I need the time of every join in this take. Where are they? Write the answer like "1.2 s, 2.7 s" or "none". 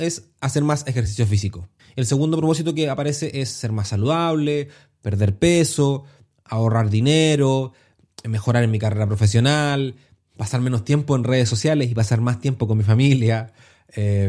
1.8 s

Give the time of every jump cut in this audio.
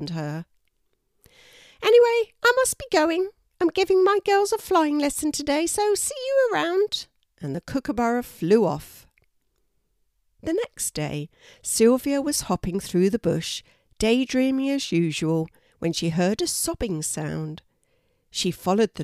none

